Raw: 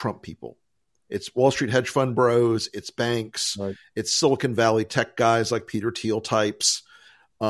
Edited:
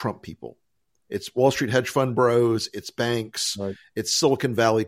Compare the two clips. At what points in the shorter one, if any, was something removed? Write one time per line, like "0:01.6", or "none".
none